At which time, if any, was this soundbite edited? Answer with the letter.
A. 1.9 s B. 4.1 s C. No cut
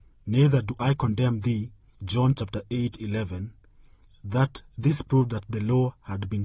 A